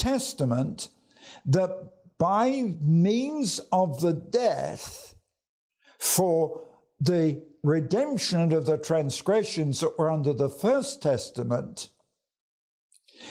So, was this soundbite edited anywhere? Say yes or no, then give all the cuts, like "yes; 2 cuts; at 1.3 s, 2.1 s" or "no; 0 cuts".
no; 0 cuts